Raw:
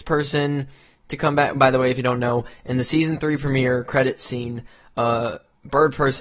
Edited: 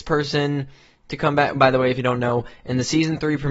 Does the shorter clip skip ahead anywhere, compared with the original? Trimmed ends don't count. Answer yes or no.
no